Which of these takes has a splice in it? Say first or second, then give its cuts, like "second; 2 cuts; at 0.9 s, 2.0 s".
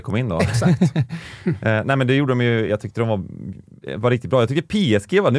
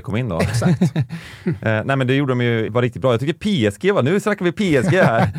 second; 1 cut; at 2.7 s